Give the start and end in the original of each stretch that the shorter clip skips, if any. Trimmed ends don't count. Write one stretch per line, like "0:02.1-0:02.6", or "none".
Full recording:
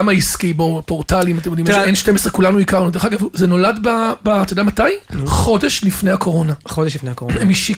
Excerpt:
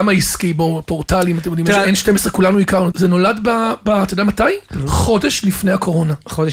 0:02.9-0:03.3